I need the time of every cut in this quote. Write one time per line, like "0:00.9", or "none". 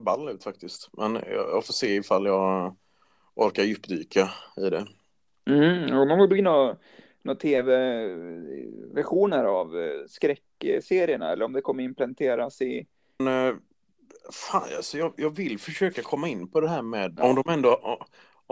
0:13.2
0:17.2